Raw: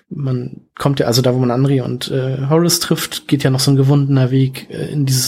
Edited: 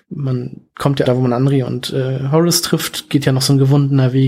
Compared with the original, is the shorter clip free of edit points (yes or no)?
no